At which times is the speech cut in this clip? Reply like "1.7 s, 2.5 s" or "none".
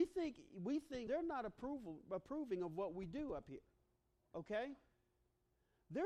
1.1 s